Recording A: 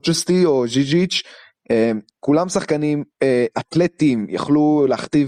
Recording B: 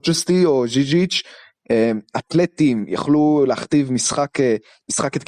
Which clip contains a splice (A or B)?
B